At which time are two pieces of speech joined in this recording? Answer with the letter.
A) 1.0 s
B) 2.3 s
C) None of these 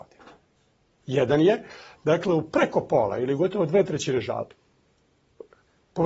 A